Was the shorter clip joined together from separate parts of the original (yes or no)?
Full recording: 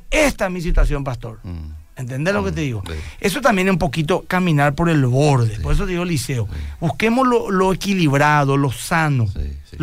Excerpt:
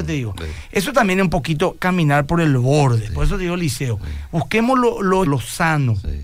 yes